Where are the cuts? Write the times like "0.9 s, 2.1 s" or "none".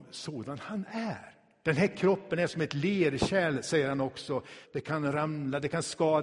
1.6 s, 4.6 s